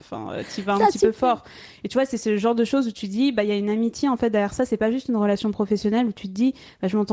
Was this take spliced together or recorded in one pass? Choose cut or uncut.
uncut